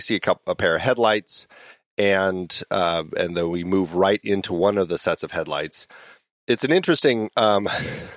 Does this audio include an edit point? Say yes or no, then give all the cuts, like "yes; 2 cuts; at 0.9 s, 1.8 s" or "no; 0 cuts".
no; 0 cuts